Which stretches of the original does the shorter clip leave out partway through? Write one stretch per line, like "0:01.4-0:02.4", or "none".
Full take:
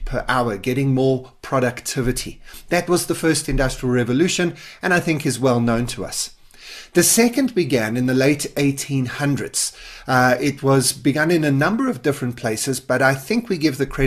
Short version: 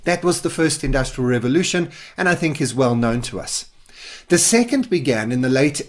none